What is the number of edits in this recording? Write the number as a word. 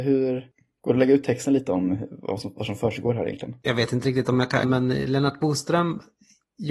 one